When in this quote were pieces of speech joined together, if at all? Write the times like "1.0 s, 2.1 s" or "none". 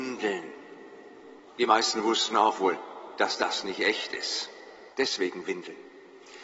1.5 s, 4.9 s